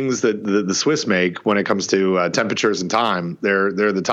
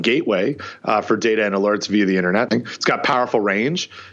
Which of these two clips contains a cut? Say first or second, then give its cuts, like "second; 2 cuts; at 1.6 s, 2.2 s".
second; 1 cut; at 2.5 s